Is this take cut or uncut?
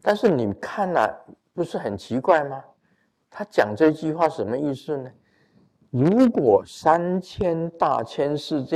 uncut